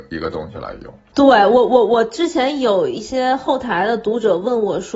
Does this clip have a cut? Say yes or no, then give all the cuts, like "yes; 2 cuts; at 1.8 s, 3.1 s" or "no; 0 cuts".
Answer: no; 0 cuts